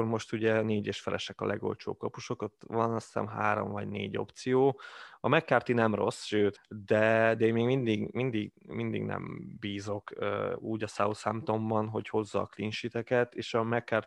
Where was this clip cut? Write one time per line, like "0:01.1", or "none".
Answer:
0:06.6